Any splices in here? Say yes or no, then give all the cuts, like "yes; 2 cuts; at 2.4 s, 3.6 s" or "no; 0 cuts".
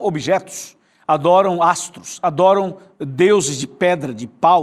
no; 0 cuts